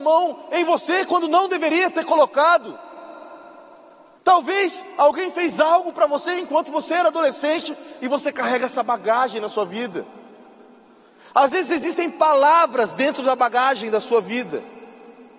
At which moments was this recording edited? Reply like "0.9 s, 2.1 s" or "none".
4.2 s